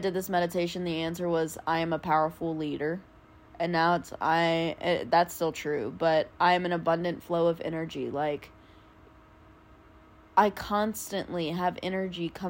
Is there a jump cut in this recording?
no; 0 cuts

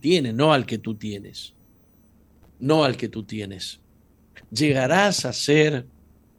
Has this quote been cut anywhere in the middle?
no; 0 cuts

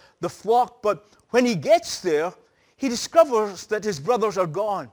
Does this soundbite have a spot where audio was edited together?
no; 0 cuts

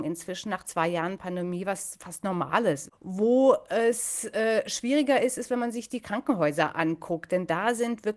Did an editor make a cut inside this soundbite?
no; 0 cuts

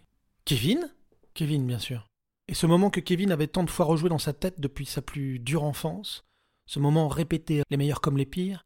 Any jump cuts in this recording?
yes; 1 cut; at 7.6 s

